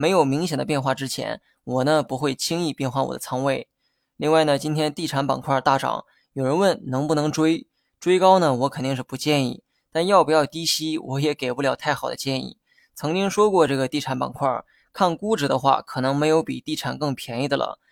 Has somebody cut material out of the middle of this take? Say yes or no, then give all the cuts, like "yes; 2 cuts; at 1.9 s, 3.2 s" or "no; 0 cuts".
no; 0 cuts